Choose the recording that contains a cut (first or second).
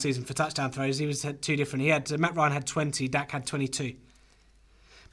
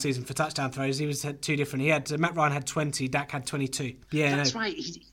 second